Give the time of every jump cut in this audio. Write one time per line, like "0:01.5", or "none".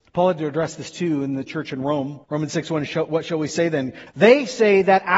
0:02.2
0:04.1